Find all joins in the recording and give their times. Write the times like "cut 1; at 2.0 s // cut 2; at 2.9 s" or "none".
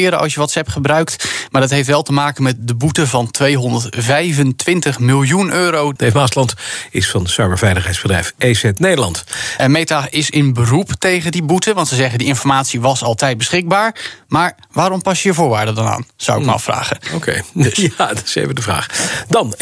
cut 1; at 6.0 s // cut 2; at 9.6 s